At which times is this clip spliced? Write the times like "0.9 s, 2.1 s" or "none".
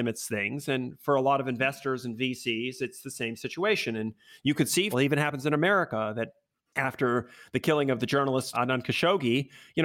4.9 s, 8.5 s